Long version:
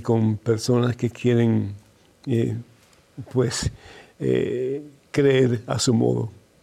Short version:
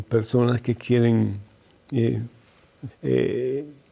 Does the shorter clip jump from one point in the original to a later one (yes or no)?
yes